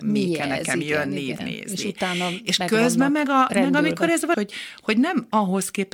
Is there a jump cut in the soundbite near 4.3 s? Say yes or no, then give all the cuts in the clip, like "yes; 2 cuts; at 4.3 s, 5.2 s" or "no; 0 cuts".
yes; 2 cuts; at 1.4 s, 4.3 s